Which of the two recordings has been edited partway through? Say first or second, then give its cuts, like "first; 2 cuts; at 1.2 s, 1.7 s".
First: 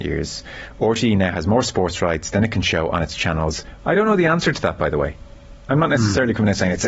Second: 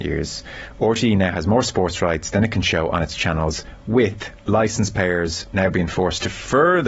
first; 1 cut; at 3.8 s